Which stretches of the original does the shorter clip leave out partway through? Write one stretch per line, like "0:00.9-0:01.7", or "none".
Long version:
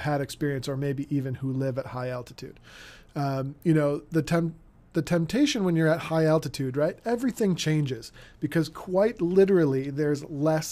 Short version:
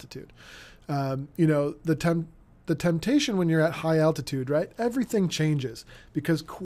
none